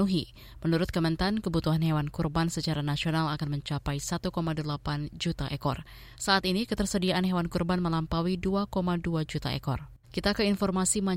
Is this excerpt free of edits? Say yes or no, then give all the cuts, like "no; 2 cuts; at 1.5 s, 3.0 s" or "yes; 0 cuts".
no; 1 cut; at 10.0 s